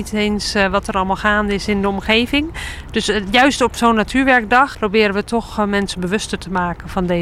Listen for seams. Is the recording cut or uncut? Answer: uncut